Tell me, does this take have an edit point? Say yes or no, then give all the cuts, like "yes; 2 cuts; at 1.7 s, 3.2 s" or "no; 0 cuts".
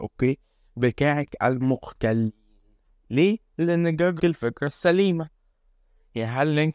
yes; 1 cut; at 4.2 s